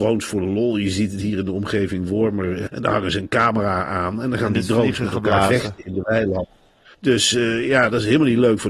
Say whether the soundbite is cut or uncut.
cut